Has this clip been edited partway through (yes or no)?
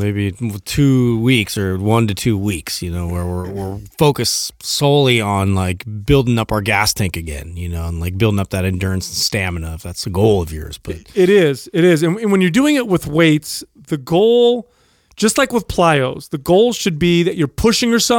no